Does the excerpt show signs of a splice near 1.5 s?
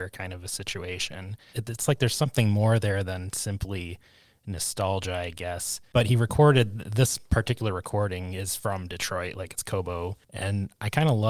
yes; 1 cut; at 1.5 s

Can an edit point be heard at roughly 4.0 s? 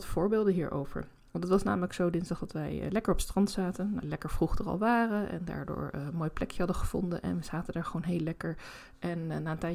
yes; 1 cut; at 4.0 s

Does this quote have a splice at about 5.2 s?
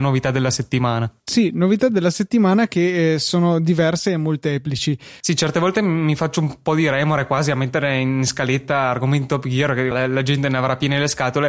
yes; 3 cuts; at 1.2 s, 5.2 s, 9.9 s

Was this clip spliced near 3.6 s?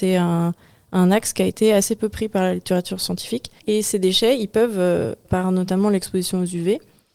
yes; 2 cuts; at 3.6 s, 5.2 s

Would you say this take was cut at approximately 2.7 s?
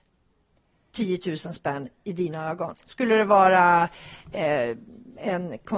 yes; 1 cut; at 2.7 s

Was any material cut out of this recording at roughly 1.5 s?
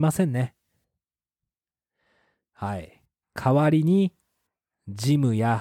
no; 1 cut; at 3.2 s

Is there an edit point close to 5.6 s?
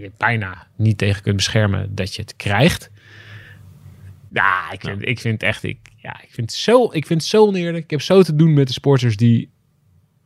no; 1 cut; at 4.3 s

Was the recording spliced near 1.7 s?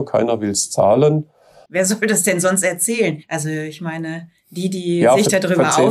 yes; 1 cut; at 1.7 s

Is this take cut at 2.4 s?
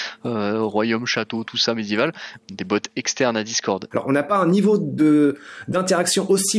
yes; 2 cuts; at 2.4 s, 3.9 s

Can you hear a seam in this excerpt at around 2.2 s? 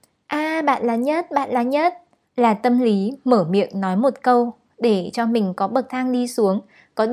yes; 1 cut; at 2.2 s

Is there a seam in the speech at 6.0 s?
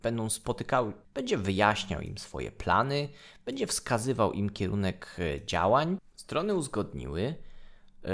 yes; 2 cuts; at 1.0 s, 6.0 s

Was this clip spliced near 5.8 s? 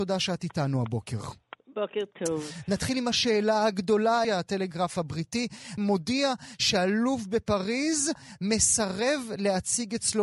yes; 2 cuts; at 4.2 s, 5.8 s

